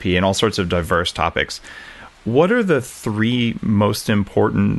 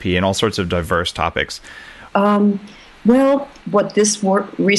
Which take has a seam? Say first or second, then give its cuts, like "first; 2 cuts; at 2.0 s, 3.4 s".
second; 2 cuts; at 2.1 s, 3.6 s